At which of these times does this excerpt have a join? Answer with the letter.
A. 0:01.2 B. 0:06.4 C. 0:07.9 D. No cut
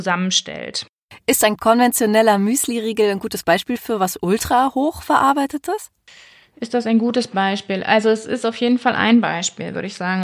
D